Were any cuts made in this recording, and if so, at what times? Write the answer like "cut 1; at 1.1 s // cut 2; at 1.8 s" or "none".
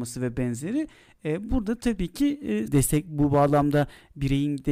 cut 1; at 2.7 s